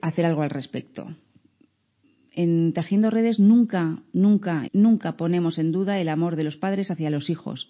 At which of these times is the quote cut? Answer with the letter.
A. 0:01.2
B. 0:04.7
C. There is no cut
B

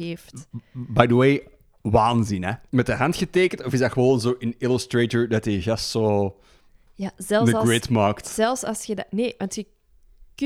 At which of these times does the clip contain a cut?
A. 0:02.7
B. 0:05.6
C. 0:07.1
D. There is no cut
A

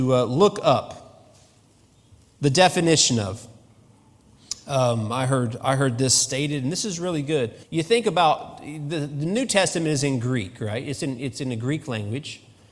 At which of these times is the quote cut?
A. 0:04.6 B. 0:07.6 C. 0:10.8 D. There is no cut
B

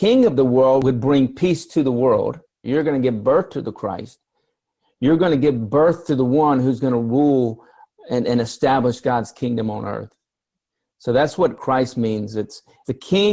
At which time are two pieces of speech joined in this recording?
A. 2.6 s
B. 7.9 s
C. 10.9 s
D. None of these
A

